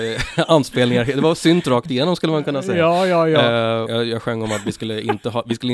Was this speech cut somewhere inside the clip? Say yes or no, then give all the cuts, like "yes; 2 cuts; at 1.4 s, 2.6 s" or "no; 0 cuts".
yes; 1 cut; at 3.9 s